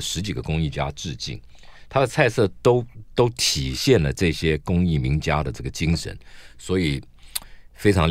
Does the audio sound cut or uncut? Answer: uncut